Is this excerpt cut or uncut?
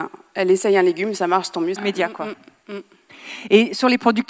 cut